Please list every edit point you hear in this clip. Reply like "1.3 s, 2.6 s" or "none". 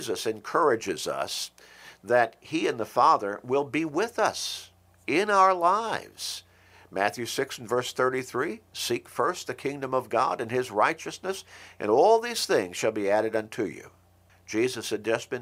14.3 s